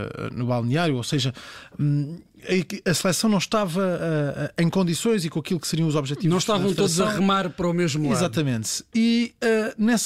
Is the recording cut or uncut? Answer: uncut